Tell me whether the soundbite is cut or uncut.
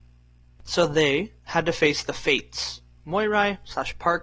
cut